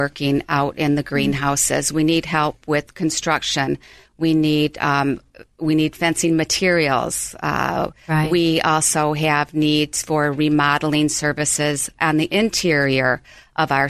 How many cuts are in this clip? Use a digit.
0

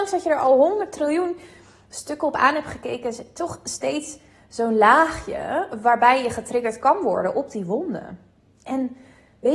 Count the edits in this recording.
0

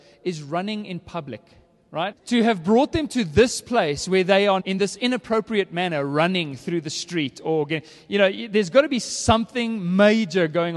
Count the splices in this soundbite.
2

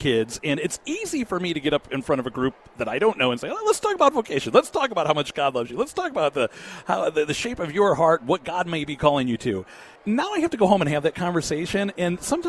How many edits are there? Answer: 1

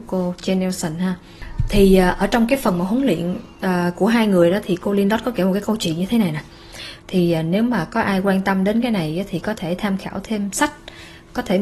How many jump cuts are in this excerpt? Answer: 1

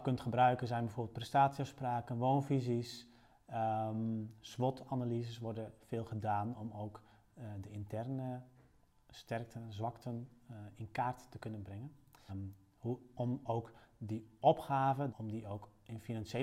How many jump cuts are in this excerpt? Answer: 2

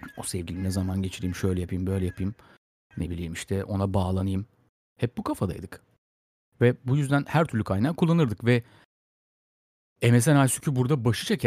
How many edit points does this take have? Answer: 0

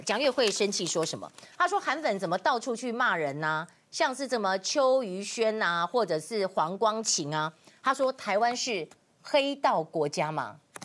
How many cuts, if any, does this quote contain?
0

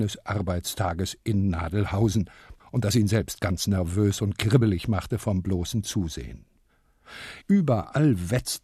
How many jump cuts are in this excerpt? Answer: 2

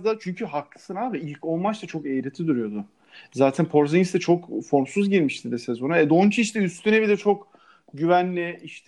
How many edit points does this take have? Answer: 0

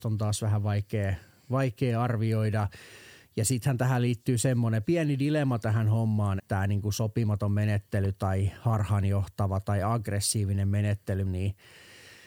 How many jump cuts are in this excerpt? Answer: 3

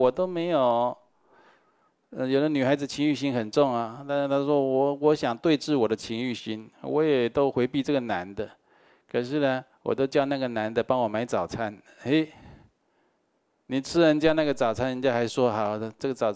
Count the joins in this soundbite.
0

